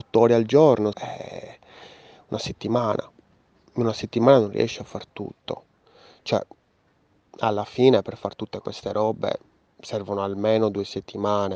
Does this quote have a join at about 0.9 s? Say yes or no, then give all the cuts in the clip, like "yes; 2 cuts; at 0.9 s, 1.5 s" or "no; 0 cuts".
yes; 1 cut; at 0.9 s